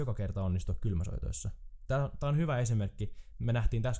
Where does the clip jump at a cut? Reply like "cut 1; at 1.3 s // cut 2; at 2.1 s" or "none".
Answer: none